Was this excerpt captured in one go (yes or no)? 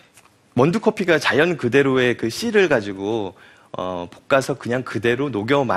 yes